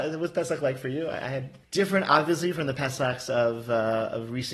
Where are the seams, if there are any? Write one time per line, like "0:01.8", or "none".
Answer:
none